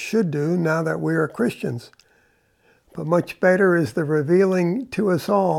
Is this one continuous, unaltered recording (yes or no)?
yes